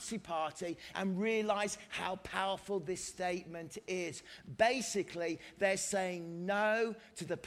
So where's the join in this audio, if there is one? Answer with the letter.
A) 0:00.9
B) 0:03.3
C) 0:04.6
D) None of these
A